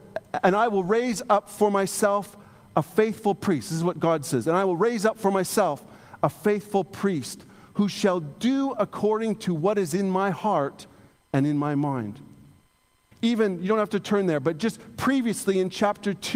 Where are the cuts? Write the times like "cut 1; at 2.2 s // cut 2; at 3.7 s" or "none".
cut 1; at 13.1 s